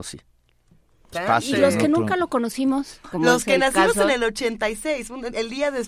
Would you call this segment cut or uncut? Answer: cut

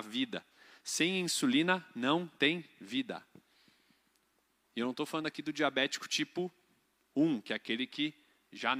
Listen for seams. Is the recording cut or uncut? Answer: uncut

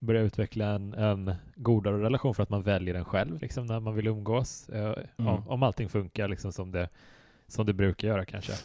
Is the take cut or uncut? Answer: cut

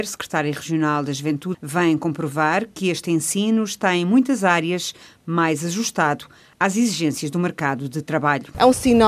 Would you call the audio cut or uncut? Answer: cut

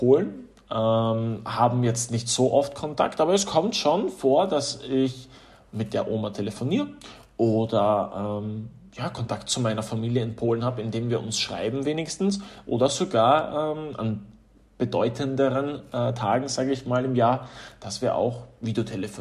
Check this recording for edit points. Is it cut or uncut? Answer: uncut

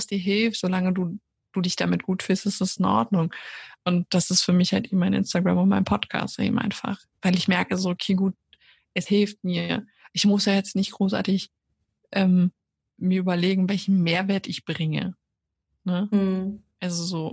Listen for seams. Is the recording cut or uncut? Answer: uncut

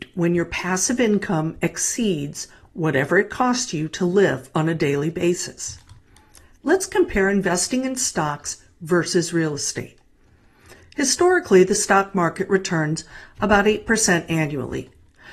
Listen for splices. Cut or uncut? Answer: uncut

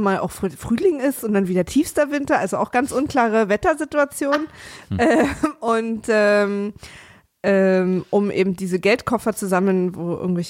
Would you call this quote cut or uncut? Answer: uncut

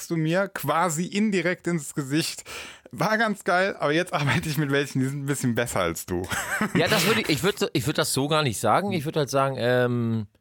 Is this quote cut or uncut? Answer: uncut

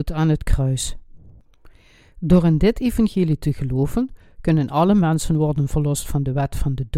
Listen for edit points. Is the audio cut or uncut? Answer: uncut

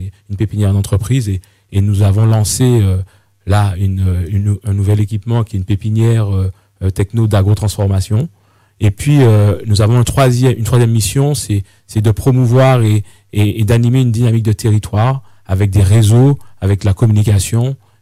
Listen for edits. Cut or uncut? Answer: uncut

